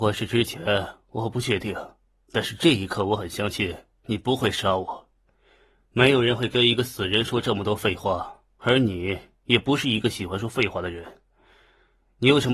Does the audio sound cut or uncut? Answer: uncut